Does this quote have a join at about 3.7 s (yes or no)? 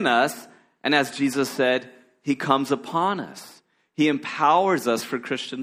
no